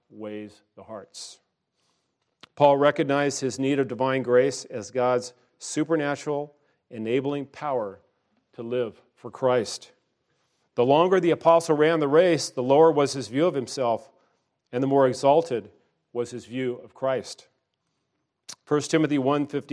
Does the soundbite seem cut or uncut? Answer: uncut